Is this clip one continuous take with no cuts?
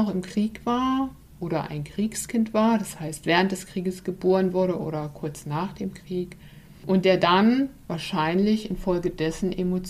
yes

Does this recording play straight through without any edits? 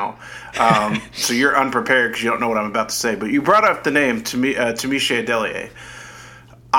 yes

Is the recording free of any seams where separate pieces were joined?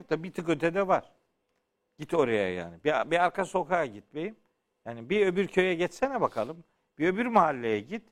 yes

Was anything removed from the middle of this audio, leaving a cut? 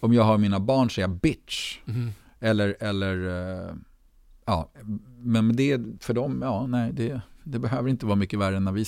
no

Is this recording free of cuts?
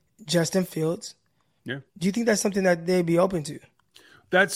no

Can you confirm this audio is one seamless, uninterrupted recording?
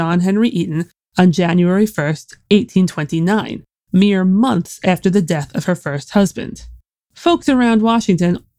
yes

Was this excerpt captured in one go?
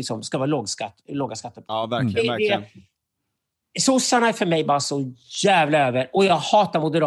no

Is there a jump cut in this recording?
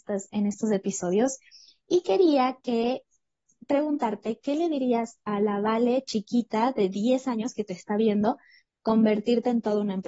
no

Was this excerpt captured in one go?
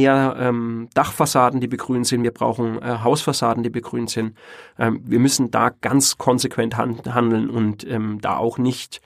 yes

